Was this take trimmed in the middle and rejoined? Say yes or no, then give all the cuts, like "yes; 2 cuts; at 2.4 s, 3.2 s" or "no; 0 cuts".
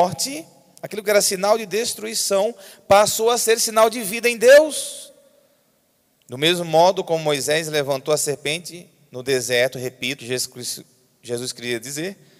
yes; 2 cuts; at 6.1 s, 10.2 s